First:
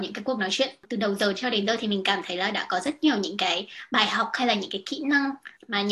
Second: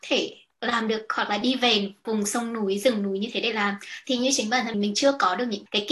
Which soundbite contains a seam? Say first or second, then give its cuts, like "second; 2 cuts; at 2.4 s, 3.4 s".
second; 1 cut; at 4.7 s